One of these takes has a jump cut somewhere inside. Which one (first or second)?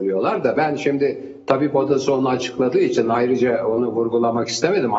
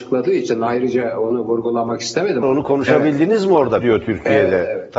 second